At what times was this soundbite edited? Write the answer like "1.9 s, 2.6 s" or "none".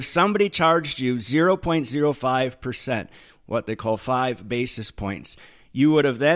none